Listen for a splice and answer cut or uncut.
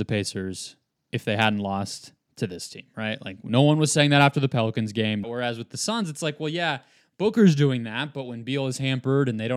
cut